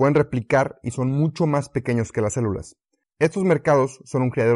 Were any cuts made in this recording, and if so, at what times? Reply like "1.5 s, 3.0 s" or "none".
3.0 s